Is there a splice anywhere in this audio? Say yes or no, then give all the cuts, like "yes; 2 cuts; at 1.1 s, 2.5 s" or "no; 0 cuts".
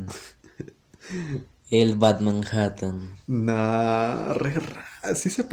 no; 0 cuts